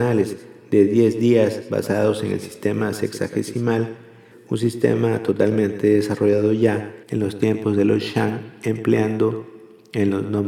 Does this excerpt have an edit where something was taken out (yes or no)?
yes